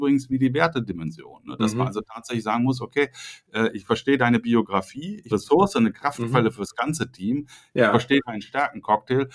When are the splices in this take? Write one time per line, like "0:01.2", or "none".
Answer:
0:05.3